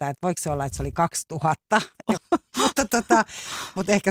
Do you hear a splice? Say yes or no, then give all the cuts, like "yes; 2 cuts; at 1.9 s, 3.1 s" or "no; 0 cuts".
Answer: yes; 1 cut; at 2.2 s